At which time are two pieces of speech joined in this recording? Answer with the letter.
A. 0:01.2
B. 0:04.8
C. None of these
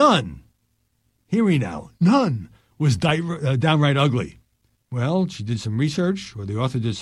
B